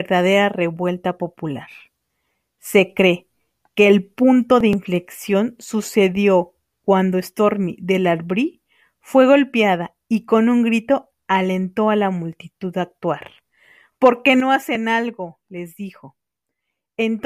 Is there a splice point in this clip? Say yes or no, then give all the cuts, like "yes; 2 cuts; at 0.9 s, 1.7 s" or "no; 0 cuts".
no; 0 cuts